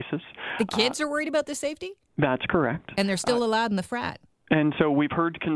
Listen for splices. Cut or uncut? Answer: uncut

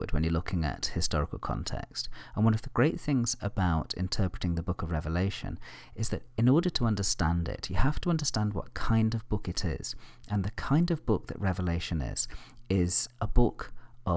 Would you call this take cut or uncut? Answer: uncut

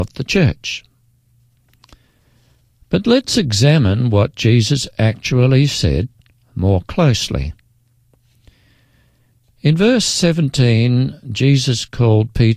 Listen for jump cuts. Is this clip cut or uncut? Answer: uncut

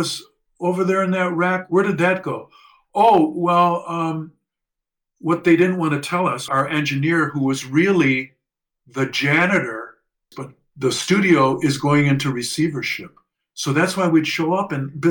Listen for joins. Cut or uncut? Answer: cut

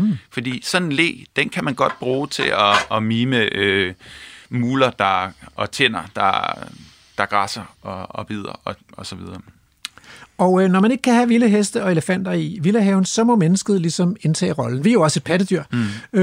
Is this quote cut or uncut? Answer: uncut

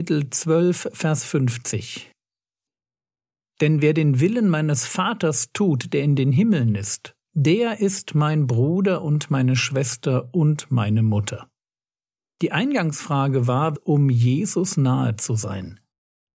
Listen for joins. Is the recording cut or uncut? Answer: cut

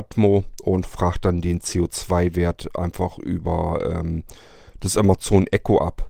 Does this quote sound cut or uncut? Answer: uncut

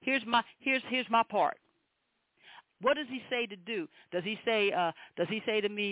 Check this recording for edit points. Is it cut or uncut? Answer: cut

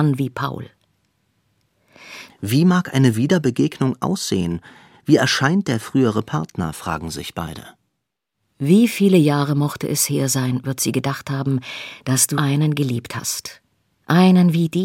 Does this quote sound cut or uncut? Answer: cut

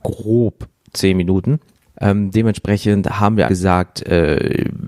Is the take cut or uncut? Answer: cut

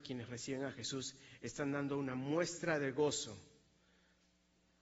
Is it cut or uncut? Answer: uncut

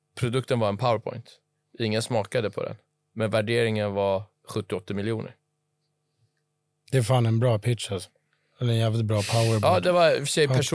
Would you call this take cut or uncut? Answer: uncut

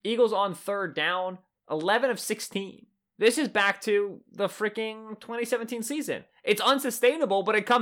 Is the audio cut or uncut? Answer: uncut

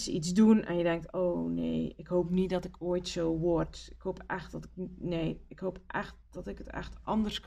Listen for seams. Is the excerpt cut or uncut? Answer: uncut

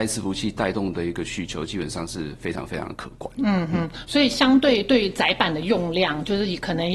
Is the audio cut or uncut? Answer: uncut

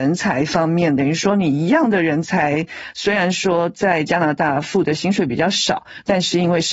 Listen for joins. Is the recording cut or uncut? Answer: uncut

